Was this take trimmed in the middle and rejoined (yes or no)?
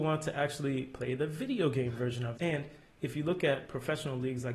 yes